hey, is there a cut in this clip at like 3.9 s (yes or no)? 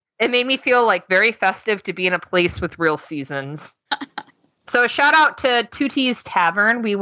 yes